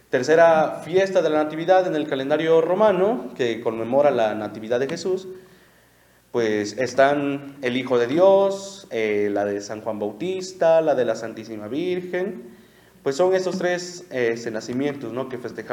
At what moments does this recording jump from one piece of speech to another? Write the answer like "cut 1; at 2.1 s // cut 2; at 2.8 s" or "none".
none